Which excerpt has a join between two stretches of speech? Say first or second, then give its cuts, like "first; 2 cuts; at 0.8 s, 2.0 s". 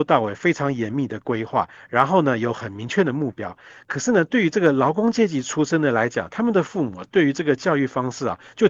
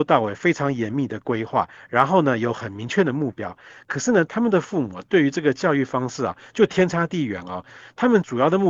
second; 1 cut; at 4.3 s